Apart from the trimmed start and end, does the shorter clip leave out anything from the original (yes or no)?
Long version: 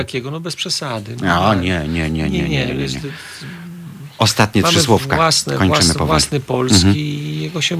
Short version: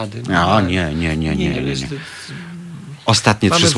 yes